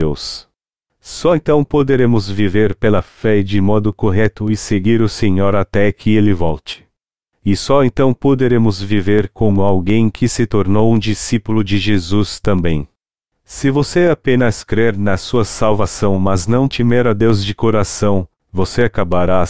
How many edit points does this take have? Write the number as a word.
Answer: one